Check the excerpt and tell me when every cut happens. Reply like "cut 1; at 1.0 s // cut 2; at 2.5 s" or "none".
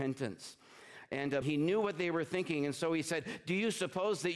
cut 1; at 1.4 s